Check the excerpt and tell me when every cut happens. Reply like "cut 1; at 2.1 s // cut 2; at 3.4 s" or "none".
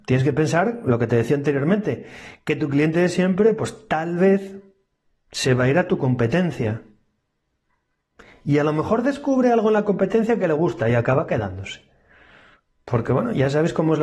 none